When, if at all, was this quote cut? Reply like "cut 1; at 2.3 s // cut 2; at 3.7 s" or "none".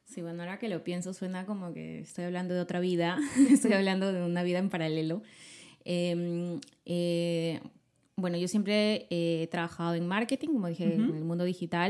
none